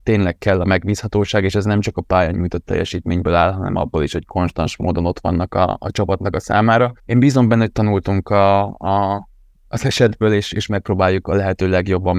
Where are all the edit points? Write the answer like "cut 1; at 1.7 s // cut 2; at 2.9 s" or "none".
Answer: cut 1; at 7.0 s